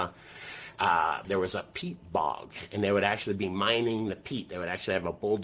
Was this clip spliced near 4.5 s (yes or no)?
no